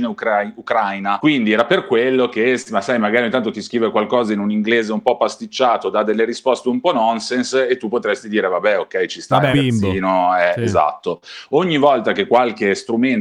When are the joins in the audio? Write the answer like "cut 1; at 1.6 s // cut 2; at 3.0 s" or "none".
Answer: cut 1; at 9.5 s